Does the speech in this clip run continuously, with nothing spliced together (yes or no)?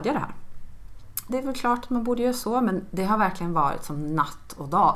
no